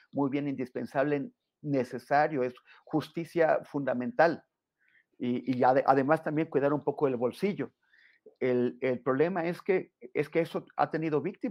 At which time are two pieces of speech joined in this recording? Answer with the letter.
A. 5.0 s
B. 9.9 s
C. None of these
C